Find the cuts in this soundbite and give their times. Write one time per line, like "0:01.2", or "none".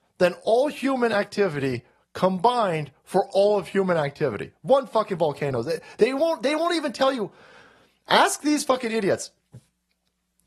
none